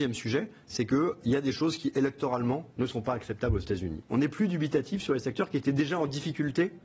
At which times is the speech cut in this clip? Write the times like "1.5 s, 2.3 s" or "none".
1.2 s, 4.0 s